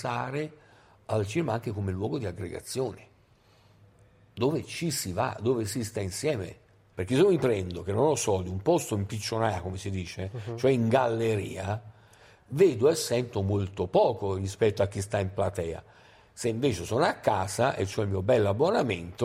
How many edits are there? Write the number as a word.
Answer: one